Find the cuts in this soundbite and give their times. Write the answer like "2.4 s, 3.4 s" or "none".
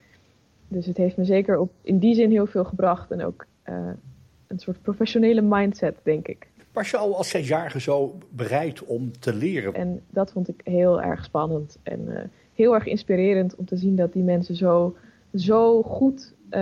9.7 s